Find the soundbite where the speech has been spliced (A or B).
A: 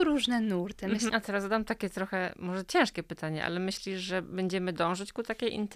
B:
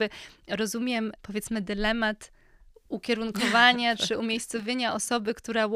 A